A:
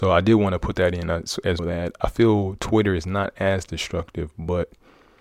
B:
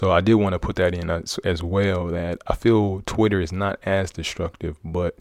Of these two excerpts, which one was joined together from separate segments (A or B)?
A